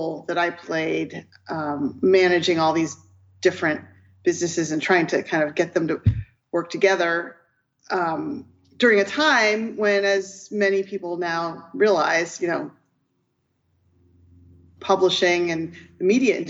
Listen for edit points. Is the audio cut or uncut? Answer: uncut